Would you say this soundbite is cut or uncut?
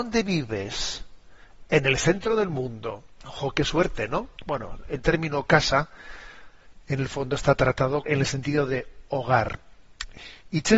cut